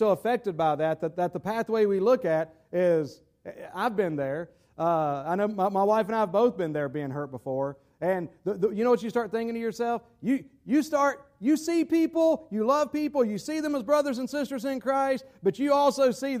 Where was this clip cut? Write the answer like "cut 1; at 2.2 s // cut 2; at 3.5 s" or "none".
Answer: none